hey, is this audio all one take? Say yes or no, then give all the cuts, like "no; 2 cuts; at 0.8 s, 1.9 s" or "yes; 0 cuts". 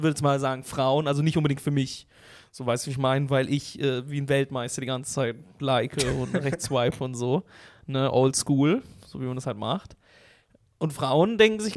yes; 0 cuts